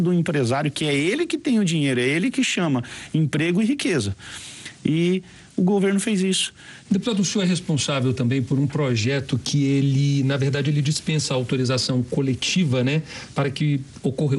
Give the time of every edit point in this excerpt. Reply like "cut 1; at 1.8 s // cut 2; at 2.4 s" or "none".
cut 1; at 6.8 s